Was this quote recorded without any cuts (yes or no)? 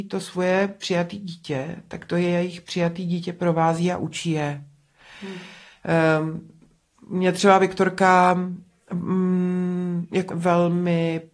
no